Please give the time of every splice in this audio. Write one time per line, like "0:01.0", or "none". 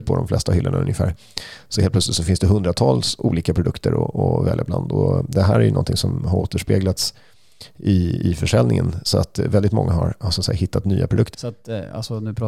0:11.3